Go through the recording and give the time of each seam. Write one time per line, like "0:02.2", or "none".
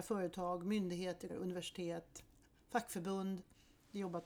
0:01.3